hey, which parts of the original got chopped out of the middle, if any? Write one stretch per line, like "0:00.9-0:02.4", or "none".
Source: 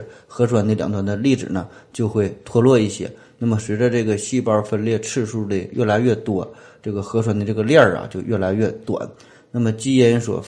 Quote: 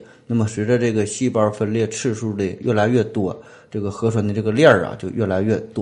none